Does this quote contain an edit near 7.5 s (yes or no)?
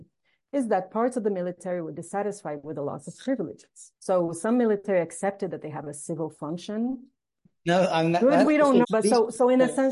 yes